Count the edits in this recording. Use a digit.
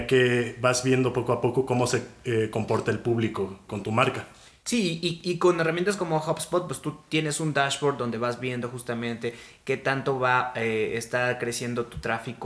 1